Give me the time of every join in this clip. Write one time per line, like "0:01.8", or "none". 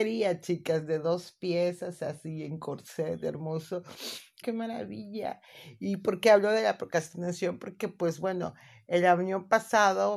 0:04.4